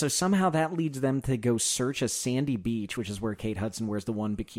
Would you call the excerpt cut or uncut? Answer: uncut